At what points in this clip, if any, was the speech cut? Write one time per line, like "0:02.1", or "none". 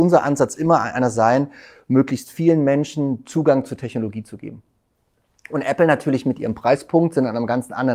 none